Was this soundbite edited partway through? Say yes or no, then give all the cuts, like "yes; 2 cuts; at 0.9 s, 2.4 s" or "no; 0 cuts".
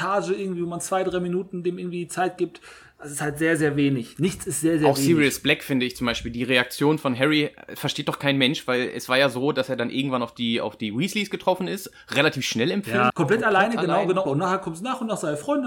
yes; 2 cuts; at 13.1 s, 14.3 s